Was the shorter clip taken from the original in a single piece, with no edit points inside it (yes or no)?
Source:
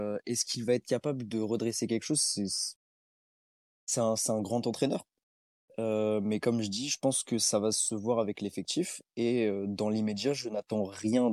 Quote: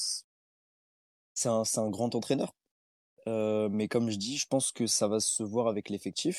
yes